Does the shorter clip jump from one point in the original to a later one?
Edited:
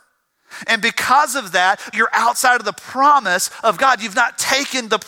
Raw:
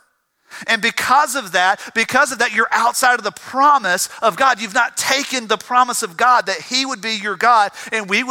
yes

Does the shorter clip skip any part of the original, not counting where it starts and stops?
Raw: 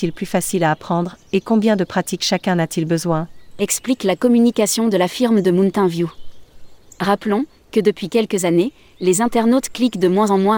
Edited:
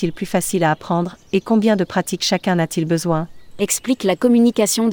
no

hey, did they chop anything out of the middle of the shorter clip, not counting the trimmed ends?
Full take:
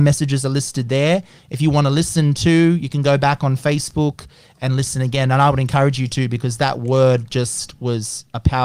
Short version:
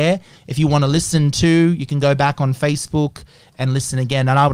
no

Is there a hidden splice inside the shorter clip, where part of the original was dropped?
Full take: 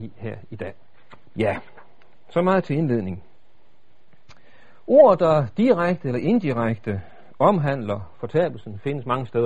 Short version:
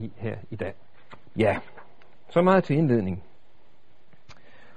no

